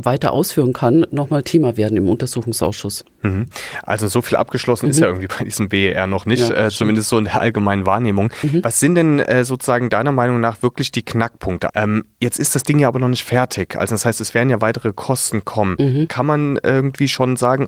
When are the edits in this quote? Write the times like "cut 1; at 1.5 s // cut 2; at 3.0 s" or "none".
cut 1; at 11.7 s // cut 2; at 16.1 s

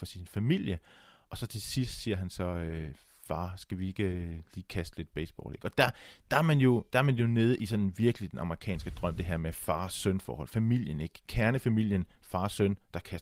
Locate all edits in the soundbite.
none

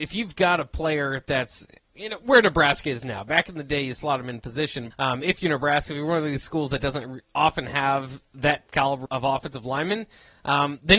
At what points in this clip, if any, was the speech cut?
cut 1; at 4.9 s // cut 2; at 9.1 s

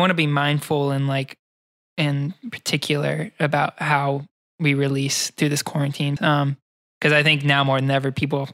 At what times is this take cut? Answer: cut 1; at 6.2 s

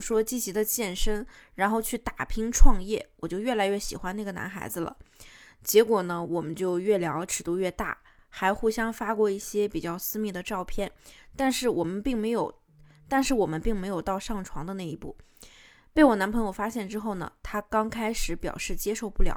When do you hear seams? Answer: none

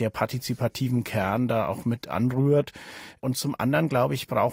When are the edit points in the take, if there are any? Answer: none

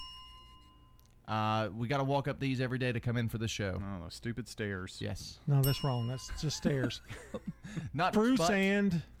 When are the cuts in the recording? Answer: cut 1; at 8.1 s

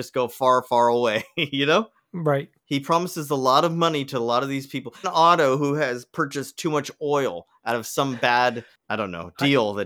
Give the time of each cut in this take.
cut 1; at 2.6 s // cut 2; at 5.0 s

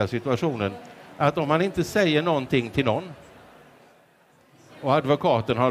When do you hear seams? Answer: none

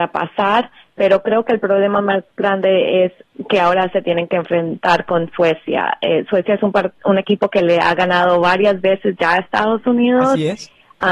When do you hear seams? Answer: none

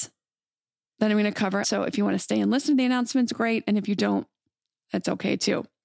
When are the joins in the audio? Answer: cut 1; at 1.6 s

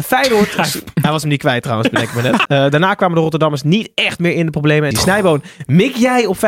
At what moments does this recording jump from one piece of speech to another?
cut 1; at 2.5 s // cut 2; at 4.9 s

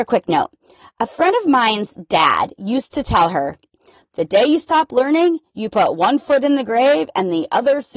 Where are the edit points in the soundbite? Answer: none

